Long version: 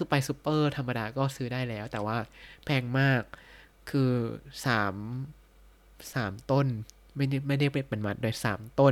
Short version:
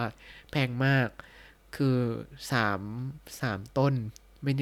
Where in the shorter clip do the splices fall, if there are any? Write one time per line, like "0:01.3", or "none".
0:03.2